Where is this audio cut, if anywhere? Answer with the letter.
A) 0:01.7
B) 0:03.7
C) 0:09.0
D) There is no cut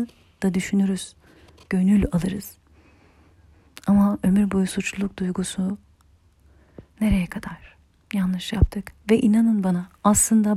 A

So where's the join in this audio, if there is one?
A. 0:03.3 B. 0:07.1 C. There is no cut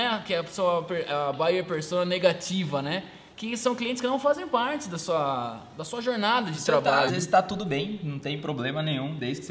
B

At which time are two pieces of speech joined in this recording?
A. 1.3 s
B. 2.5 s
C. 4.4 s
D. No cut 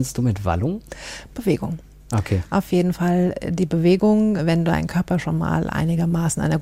C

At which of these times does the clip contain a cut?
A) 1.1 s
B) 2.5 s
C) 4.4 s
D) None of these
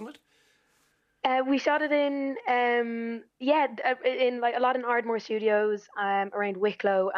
D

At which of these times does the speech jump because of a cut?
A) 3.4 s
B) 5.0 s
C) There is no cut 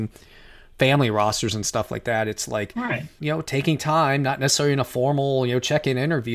C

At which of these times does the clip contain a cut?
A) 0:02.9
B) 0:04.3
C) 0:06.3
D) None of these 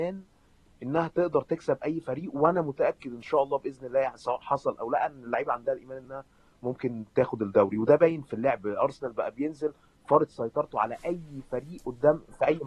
D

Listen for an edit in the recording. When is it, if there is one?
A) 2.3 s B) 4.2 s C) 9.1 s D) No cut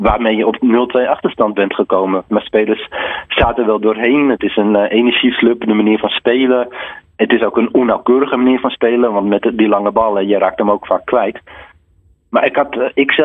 A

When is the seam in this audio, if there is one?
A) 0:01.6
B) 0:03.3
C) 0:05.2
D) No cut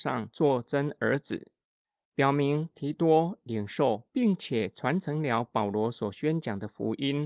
D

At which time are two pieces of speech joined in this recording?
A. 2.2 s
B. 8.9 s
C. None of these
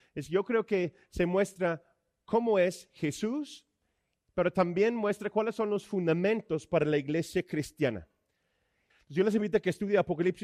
B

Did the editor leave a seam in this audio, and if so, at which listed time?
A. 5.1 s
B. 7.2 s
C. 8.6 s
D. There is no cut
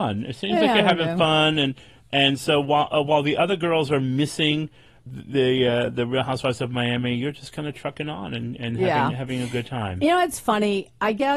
A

